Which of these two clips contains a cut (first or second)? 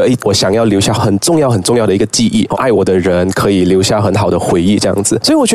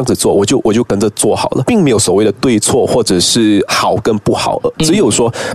first